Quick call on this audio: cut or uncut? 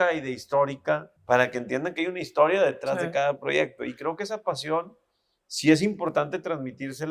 cut